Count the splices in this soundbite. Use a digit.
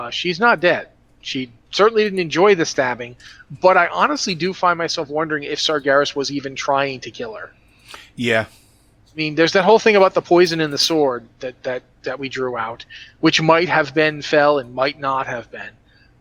0